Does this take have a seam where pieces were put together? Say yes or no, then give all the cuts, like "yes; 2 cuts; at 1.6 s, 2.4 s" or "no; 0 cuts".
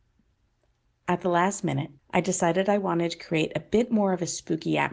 yes; 1 cut; at 2.0 s